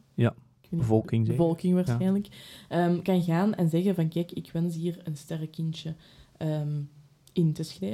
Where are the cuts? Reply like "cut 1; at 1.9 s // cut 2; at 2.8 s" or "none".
none